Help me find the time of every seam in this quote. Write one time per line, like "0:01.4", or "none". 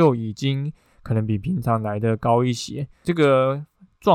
0:03.0